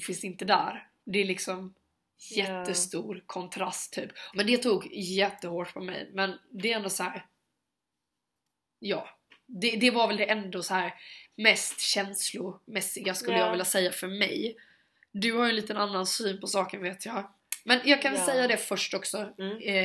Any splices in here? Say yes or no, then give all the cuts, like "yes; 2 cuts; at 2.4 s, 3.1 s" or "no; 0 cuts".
yes; 1 cut; at 4.3 s